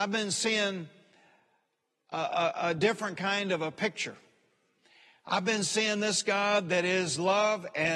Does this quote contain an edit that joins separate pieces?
no; 0 cuts

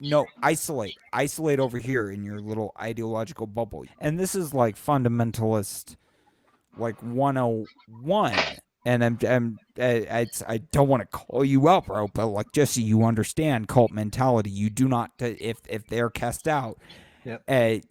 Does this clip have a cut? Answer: yes; 1 cut; at 3.9 s

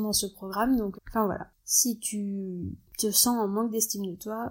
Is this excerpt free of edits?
no; 1 cut; at 0.9 s

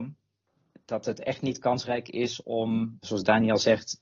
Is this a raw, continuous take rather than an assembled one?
no; 1 cut; at 3.0 s

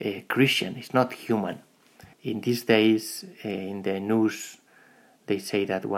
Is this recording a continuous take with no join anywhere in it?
no; 1 cut; at 2.1 s

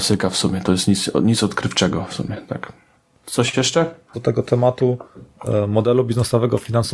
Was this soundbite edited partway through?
yes; 1 cut; at 4.1 s

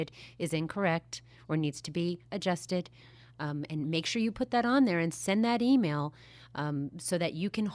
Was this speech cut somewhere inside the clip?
no; 0 cuts

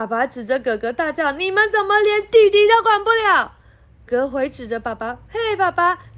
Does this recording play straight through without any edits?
no; 1 cut; at 4.1 s

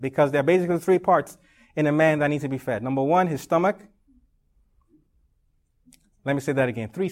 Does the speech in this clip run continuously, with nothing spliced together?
yes; 0 cuts

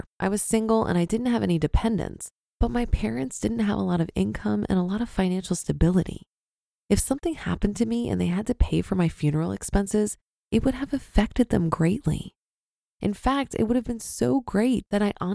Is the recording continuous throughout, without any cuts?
yes; 0 cuts

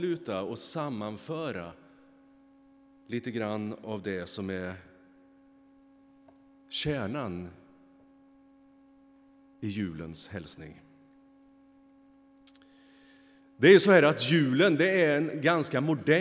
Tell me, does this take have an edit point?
no; 0 cuts

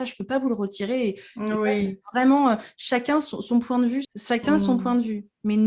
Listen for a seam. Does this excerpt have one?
yes; 1 cut; at 4.0 s

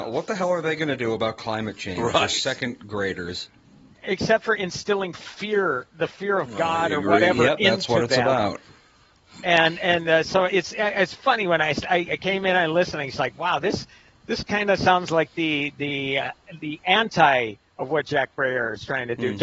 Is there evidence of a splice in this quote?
no; 0 cuts

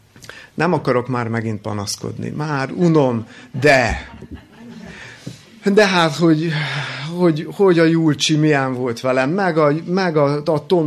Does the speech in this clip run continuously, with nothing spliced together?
yes; 0 cuts

